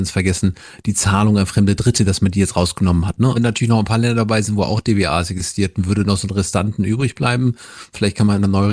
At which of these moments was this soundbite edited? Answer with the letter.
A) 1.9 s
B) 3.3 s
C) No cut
B